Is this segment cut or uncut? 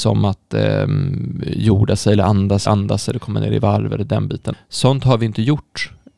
cut